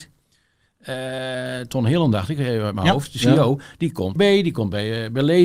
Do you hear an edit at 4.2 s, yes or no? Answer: yes